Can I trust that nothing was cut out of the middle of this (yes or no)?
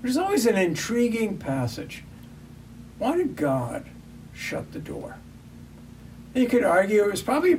yes